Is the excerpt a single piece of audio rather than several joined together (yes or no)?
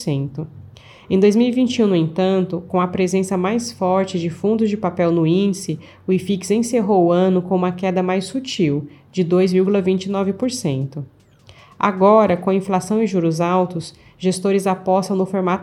yes